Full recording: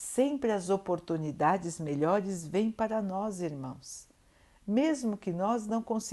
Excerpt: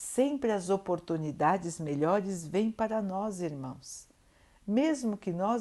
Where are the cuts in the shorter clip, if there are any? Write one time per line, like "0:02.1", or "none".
none